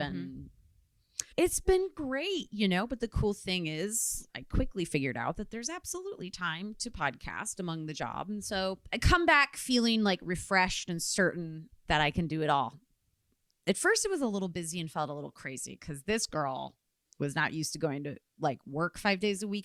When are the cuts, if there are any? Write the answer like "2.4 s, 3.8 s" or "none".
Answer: 1.3 s, 4.3 s, 11.8 s